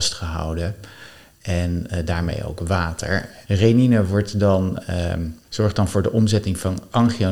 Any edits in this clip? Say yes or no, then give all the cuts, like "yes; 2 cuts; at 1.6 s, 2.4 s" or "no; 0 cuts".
yes; 2 cuts; at 3.4 s, 5.4 s